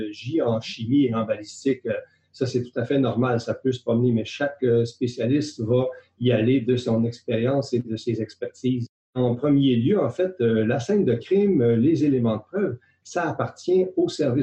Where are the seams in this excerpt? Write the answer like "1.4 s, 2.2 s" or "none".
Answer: none